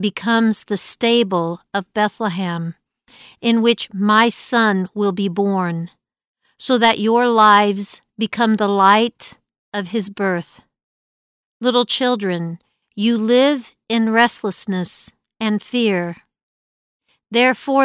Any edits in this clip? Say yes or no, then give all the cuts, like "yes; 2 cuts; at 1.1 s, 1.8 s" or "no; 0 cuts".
no; 0 cuts